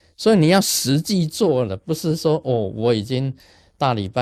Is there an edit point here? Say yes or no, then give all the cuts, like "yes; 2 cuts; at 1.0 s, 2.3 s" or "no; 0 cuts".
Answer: no; 0 cuts